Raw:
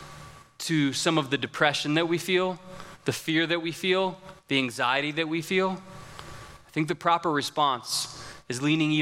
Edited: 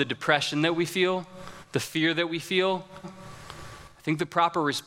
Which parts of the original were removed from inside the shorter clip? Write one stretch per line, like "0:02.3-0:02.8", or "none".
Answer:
0:04.4-0:05.7

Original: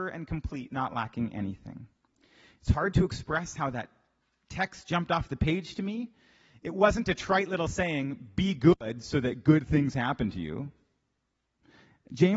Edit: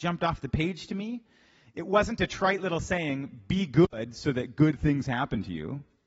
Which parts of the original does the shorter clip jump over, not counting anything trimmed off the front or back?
none

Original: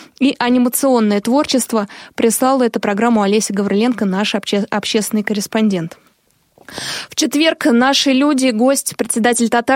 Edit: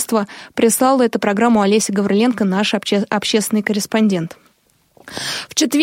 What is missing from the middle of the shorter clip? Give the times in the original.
none

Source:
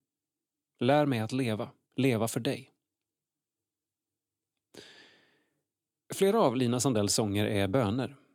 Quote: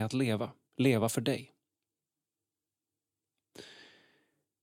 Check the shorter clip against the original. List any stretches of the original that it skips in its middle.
none

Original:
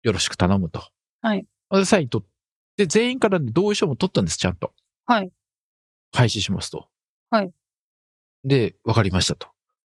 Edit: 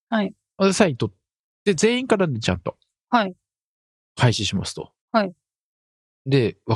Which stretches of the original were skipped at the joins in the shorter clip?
0:03.5-0:04.4
0:07.0-0:07.2

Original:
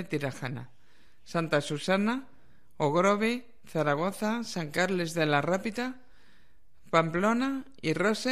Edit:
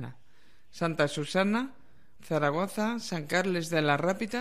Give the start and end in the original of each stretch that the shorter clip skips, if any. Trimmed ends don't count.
0:02.7-0:03.6

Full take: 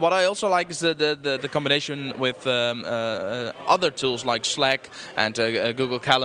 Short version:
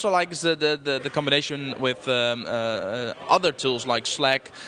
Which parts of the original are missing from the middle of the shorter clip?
none

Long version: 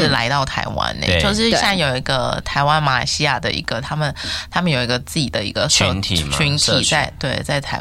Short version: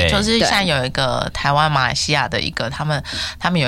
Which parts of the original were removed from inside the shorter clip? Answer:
none

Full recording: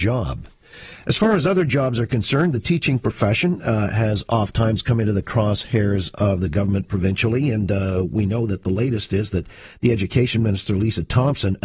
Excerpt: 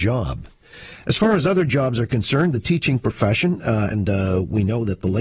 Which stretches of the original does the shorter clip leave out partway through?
0:03.9-0:07.5

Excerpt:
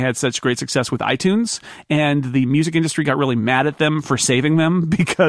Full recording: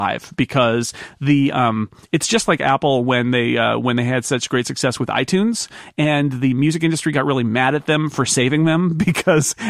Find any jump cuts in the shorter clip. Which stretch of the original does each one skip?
none

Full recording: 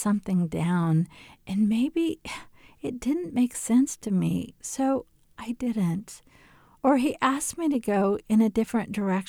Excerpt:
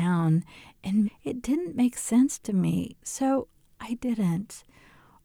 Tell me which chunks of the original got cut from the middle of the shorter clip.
0:01.7-0:02.6

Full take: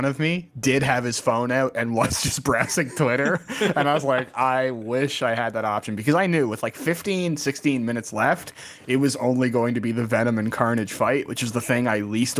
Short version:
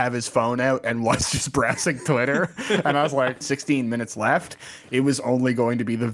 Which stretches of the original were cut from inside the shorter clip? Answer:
0:04.3-0:07.4

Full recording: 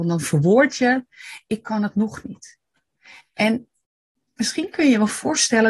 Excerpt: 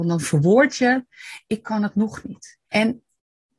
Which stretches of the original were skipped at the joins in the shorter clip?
0:02.6-0:03.3

